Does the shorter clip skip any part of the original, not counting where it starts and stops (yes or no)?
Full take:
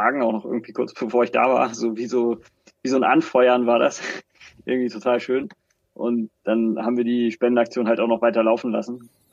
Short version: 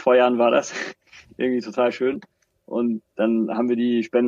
no